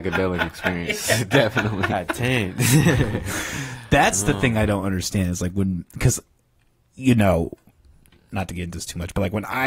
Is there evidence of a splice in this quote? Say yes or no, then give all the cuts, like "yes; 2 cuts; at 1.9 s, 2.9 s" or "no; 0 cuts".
no; 0 cuts